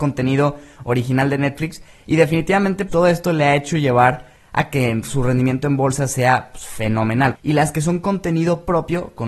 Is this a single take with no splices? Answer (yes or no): no